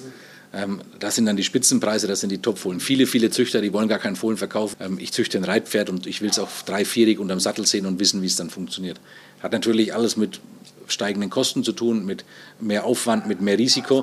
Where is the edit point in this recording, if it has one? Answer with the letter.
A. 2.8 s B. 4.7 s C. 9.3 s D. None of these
B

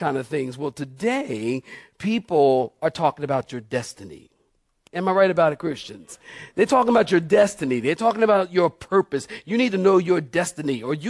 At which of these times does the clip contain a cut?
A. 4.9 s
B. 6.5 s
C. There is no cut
A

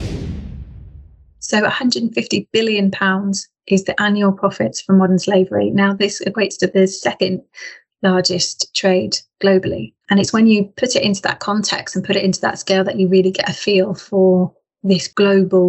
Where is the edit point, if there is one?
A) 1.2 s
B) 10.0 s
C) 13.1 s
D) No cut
B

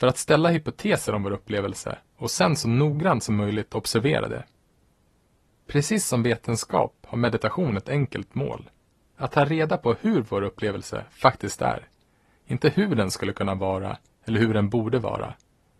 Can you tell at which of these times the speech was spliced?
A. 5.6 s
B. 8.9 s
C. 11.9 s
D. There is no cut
D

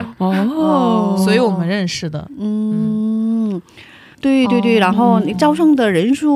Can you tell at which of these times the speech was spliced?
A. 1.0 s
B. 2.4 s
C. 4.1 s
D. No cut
C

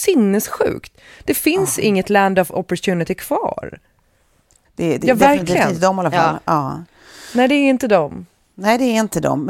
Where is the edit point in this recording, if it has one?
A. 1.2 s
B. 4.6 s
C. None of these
B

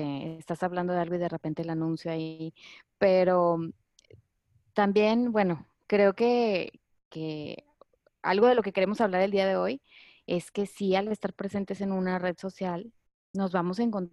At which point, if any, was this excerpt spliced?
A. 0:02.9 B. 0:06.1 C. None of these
C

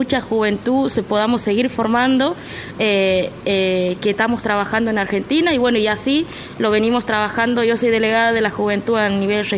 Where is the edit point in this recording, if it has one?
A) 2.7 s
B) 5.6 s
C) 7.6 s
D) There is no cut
A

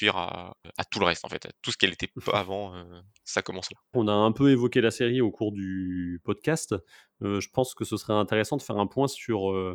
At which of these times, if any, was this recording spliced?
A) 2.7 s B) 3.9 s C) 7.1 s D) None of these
B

